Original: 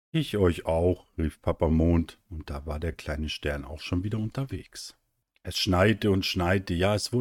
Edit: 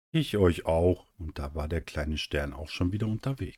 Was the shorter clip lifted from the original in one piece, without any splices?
no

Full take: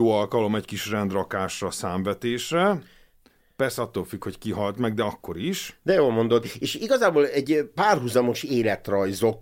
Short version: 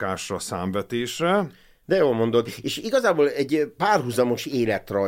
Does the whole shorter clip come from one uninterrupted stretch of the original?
no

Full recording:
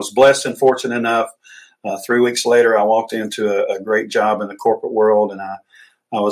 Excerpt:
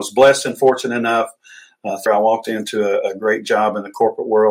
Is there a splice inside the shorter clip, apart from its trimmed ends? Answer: yes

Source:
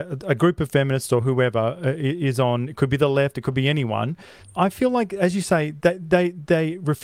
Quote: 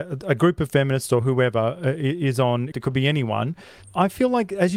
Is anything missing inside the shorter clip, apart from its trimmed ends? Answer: yes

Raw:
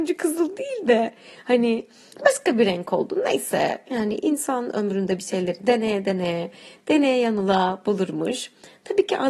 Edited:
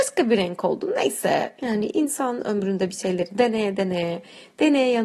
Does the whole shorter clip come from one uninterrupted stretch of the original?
yes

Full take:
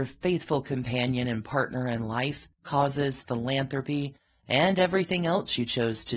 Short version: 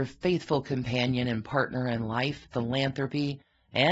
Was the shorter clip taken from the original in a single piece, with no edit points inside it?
no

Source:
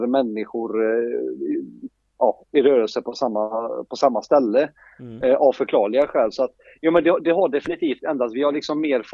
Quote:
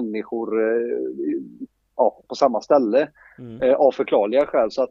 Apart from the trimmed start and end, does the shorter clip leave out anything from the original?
yes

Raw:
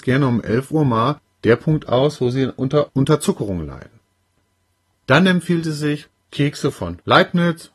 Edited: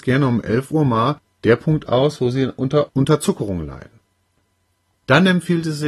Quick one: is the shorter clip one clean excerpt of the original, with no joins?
yes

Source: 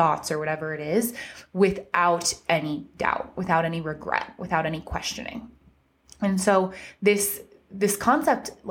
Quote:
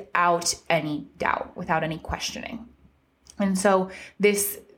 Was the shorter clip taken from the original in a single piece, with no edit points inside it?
no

